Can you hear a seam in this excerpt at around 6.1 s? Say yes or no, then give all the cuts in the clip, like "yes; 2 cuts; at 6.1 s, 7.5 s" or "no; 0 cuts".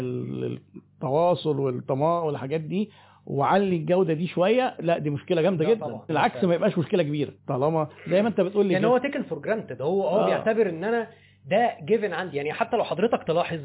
yes; 2 cuts; at 6.1 s, 7.4 s